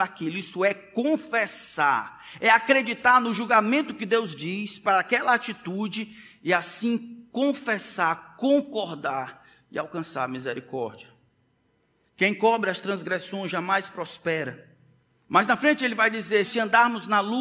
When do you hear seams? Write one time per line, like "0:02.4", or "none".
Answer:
0:15.2
0:16.4

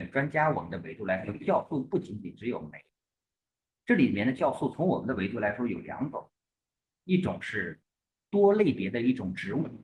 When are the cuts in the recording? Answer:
none

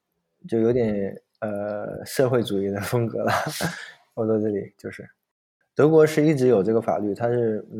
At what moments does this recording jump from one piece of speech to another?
none

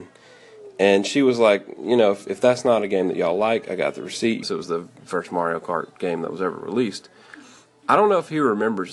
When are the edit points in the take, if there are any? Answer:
0:04.4

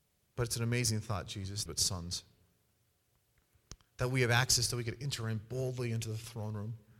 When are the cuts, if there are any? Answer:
0:01.7

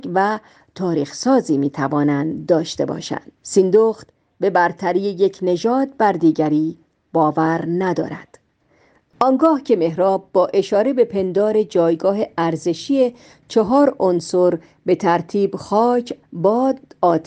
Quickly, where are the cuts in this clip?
0:03.4
0:16.2

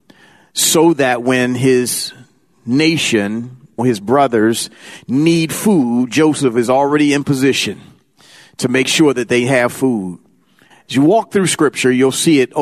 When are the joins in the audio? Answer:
0:03.8
0:10.7

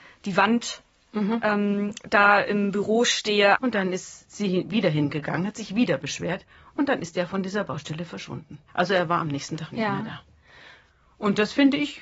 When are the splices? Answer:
0:03.6
0:08.7

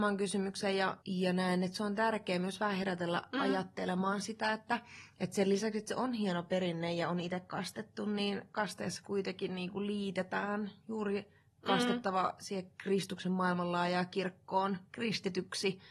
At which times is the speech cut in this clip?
0:01.0

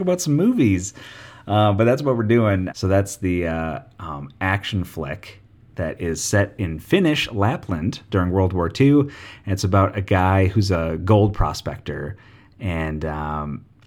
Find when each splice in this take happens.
0:02.7

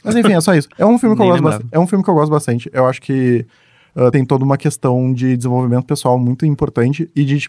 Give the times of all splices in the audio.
none

